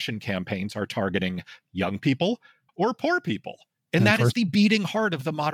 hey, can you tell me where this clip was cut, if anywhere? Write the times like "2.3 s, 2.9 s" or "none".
2.7 s